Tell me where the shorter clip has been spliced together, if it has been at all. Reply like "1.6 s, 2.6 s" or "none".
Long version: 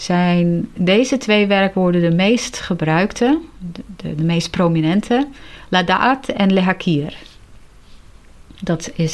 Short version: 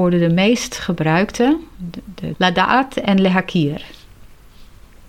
2.3 s